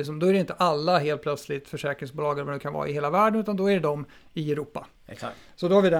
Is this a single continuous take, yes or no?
no